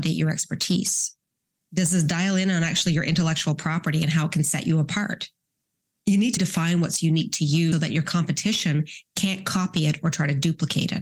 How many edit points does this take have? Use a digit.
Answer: 2